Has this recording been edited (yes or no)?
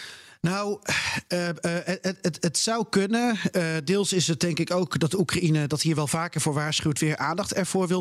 no